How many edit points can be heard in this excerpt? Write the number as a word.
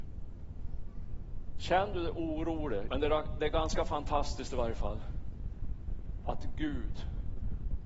two